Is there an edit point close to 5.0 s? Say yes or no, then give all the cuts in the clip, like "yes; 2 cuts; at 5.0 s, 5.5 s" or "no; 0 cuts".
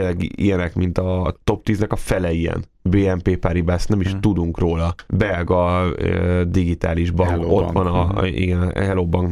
no; 0 cuts